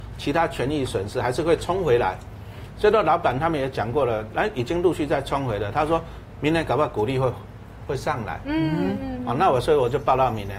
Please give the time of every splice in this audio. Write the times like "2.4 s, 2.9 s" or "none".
none